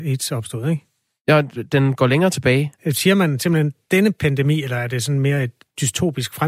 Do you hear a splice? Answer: yes; 1 cut; at 2.8 s

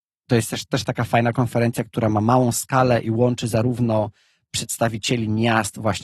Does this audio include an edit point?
no; 0 cuts

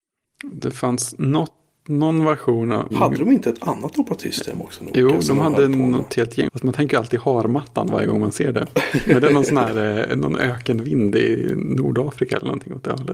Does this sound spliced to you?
yes; 2 cuts; at 2.9 s, 6.5 s

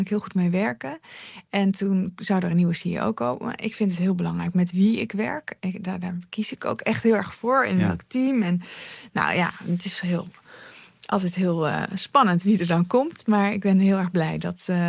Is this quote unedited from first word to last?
yes; 0 cuts

